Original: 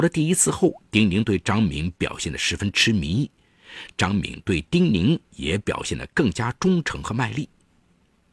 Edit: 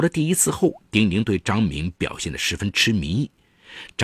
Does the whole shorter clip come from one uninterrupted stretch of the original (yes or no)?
yes